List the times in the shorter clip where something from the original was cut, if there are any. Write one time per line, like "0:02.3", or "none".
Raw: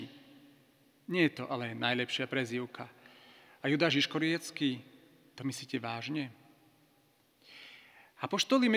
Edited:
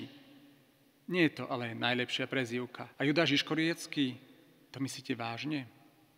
0:02.9